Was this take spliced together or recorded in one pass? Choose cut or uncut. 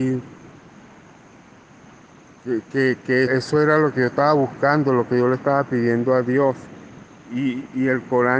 cut